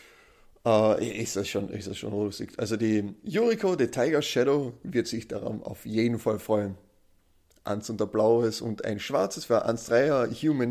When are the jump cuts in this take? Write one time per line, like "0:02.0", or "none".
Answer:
none